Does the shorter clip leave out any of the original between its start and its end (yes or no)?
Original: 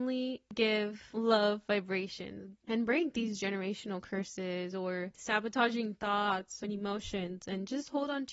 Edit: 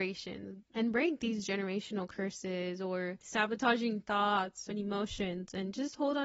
no